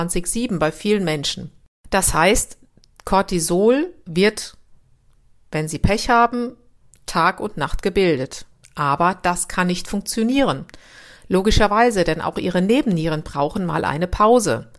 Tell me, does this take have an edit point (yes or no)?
no